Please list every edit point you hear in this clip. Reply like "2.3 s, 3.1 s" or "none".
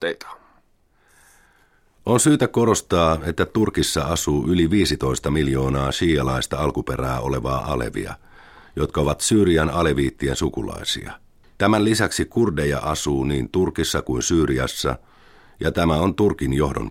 11.4 s